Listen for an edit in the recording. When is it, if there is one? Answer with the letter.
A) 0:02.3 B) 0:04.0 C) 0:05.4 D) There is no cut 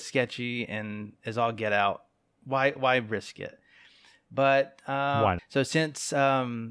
C